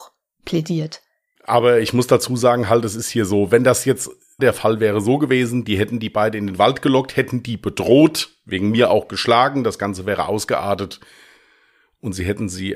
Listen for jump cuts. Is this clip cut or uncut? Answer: cut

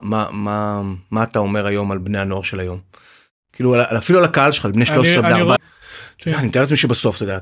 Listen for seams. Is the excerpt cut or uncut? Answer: cut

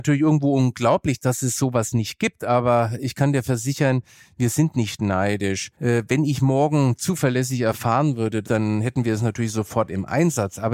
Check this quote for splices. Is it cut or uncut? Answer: cut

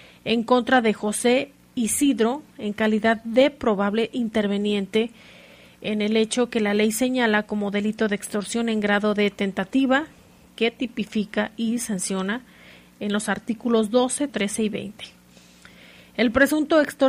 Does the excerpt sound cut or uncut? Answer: cut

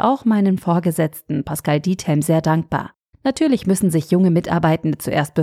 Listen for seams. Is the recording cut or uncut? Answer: cut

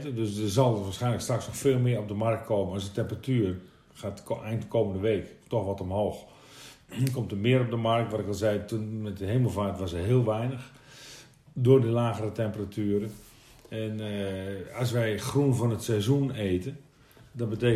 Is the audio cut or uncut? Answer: uncut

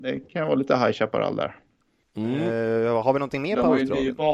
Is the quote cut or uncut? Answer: cut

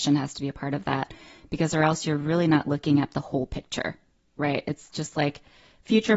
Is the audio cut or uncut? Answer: uncut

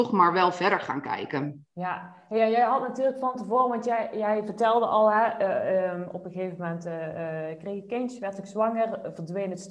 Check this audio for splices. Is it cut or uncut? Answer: uncut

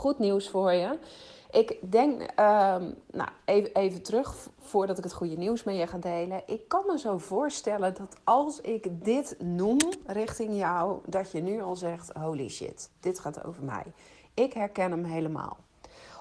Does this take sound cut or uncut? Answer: uncut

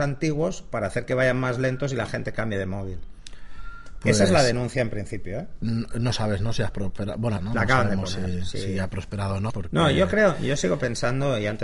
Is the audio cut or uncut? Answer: cut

